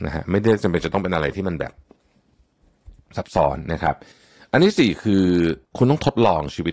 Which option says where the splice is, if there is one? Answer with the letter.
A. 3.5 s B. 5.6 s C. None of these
B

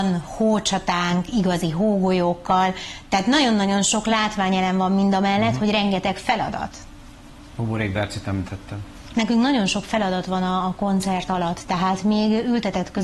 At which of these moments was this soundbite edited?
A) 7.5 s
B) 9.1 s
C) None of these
B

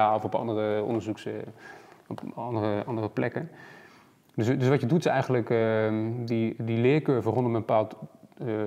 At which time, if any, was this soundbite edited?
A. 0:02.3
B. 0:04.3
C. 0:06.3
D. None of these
D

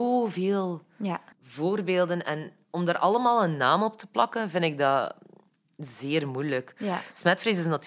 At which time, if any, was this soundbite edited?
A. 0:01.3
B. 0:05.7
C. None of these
A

